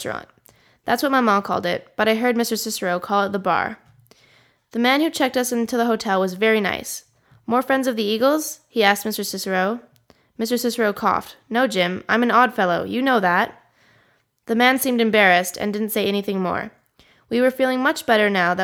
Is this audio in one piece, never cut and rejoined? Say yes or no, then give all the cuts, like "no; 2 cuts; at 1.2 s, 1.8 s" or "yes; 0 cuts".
yes; 0 cuts